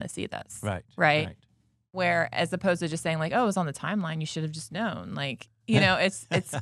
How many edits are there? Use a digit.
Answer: 0